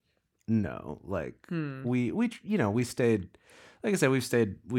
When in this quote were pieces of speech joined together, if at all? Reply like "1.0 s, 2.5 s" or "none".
none